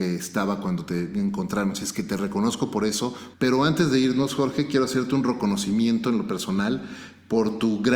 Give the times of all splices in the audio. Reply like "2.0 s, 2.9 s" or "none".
3.3 s